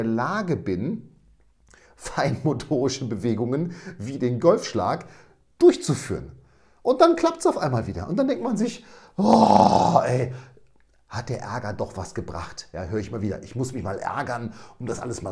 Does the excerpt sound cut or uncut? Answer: uncut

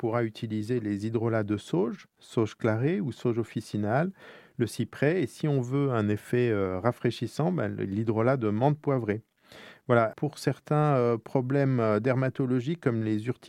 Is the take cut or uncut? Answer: cut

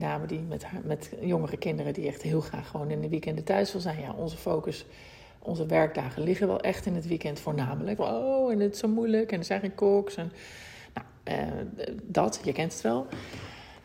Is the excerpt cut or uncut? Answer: cut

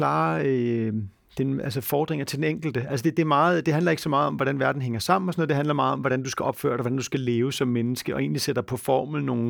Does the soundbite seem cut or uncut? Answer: uncut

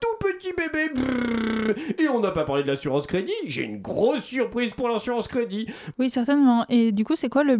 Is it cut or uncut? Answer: cut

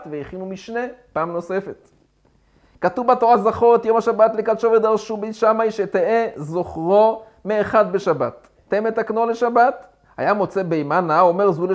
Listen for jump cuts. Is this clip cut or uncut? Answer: cut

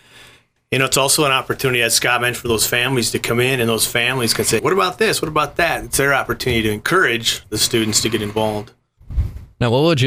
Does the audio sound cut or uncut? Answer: cut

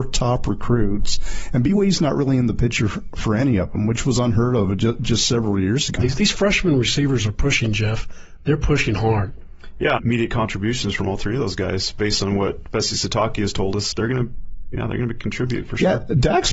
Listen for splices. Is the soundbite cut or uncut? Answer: cut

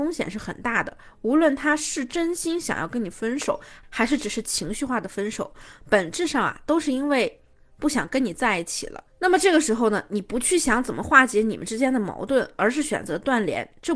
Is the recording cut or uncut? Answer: uncut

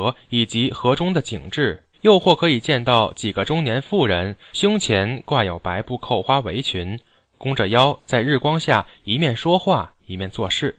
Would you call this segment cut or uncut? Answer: cut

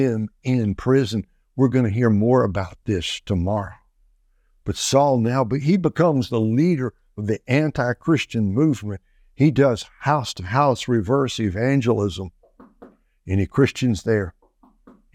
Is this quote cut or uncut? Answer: uncut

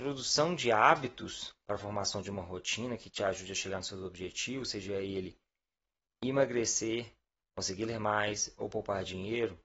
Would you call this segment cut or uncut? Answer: uncut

